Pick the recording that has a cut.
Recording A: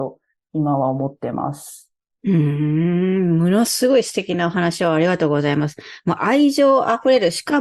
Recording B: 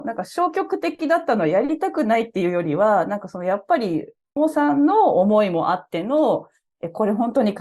B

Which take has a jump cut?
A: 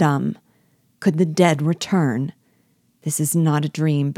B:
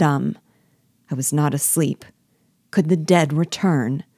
A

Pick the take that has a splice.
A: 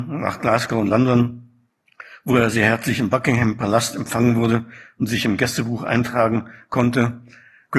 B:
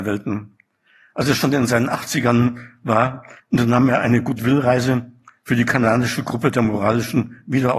B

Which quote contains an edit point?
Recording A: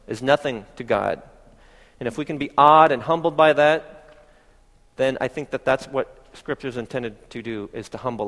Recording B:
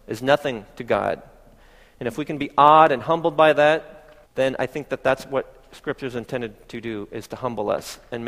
B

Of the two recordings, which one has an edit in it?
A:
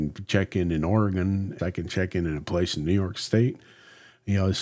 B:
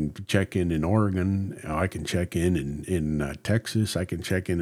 A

